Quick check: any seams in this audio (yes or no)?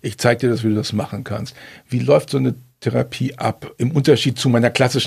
no